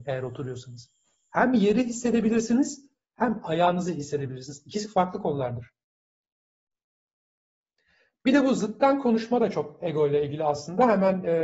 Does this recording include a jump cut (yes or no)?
no